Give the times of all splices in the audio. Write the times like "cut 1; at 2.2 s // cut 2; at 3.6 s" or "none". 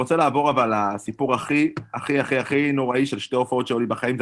none